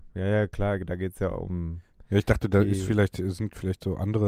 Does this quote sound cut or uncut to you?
uncut